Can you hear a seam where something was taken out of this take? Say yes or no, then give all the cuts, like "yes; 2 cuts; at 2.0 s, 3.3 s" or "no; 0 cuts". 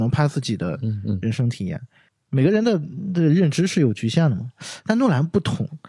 no; 0 cuts